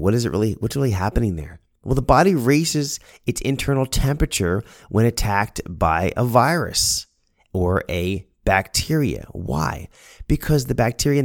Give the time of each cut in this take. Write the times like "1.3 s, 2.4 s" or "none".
none